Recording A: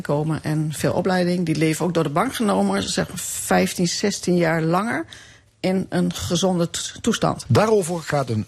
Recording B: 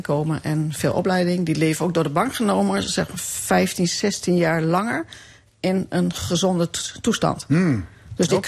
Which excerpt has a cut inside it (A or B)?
A